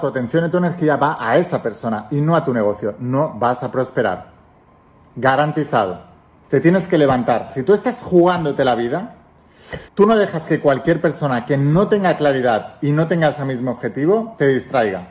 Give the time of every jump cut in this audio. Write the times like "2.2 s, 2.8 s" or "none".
6.4 s, 7.5 s, 9.9 s